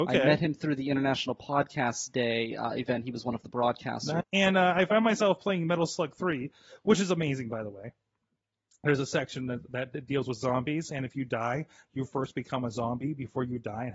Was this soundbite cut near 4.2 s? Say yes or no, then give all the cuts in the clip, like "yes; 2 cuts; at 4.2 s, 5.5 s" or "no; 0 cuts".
yes; 1 cut; at 4.2 s